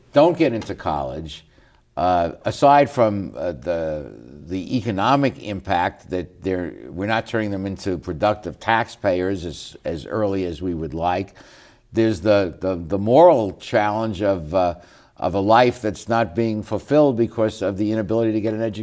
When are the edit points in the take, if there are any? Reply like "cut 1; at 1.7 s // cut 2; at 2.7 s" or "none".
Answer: none

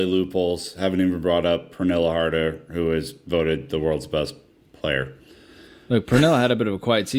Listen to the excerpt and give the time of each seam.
none

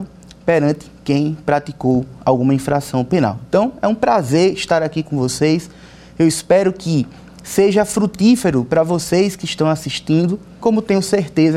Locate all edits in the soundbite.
cut 1; at 10.6 s

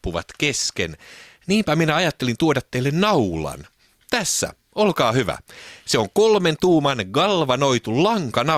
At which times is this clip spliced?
none

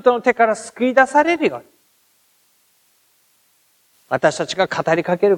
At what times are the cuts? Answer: cut 1; at 3.9 s

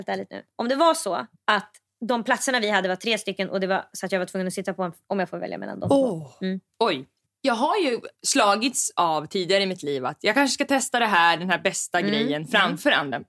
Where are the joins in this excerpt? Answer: cut 1; at 5.0 s // cut 2; at 8.2 s

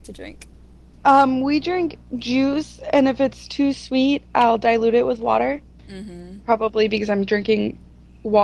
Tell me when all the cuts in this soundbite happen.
cut 1; at 5.9 s

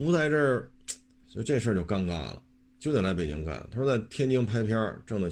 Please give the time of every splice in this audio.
cut 1; at 1.2 s // cut 2; at 2.7 s

